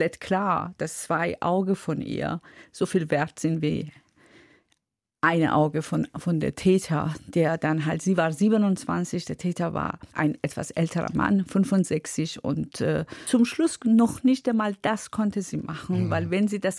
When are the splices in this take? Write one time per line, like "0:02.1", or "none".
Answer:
0:10.1